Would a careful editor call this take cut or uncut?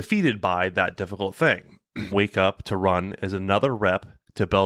cut